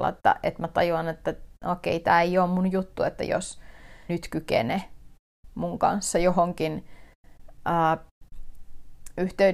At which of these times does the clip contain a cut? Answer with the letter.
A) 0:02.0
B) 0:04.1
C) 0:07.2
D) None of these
B